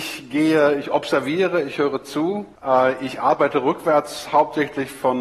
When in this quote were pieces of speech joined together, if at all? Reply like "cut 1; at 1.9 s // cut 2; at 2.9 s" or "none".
cut 1; at 2.6 s